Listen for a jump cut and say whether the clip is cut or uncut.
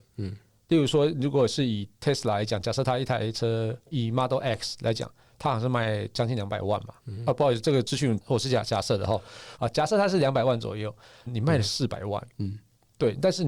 cut